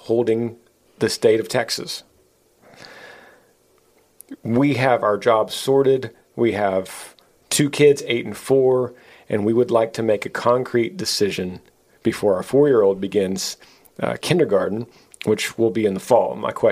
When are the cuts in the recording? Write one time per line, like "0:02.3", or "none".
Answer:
none